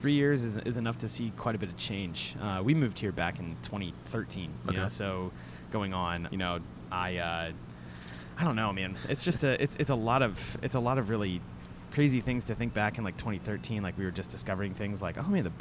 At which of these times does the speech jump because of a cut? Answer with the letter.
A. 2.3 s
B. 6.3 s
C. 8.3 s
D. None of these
B